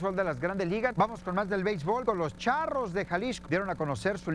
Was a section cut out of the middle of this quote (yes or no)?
yes